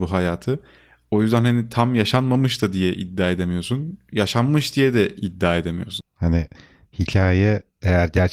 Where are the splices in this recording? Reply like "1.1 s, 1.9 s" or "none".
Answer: 6.0 s